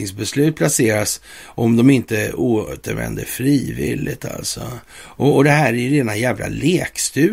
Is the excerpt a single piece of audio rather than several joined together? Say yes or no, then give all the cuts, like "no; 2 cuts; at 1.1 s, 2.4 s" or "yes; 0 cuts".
yes; 0 cuts